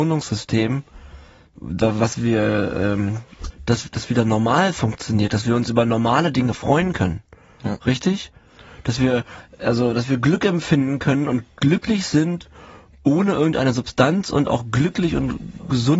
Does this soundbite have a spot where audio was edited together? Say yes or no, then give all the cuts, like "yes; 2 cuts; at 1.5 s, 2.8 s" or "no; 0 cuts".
yes; 1 cut; at 3.5 s